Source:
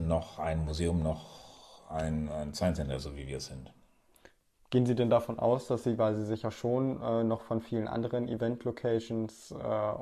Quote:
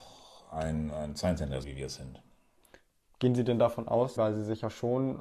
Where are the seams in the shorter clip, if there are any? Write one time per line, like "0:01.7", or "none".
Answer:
0:01.6
0:04.2